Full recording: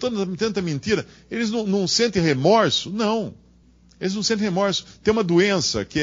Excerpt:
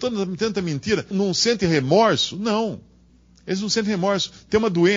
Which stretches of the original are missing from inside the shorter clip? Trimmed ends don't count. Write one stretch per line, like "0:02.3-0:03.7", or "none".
0:01.1-0:01.6